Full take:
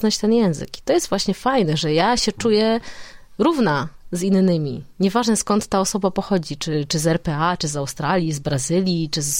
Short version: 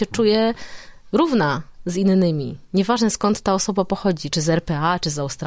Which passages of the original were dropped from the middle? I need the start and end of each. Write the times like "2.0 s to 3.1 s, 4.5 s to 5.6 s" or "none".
6.6 s to 6.9 s